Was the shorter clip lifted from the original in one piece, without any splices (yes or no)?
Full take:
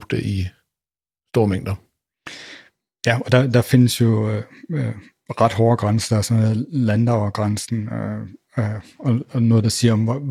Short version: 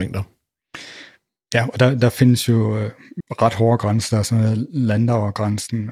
no